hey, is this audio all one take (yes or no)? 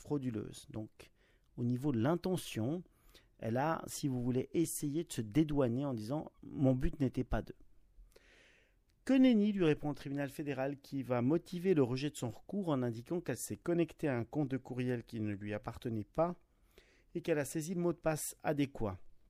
yes